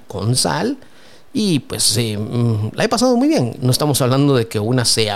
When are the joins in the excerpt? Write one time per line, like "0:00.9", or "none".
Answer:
0:03.6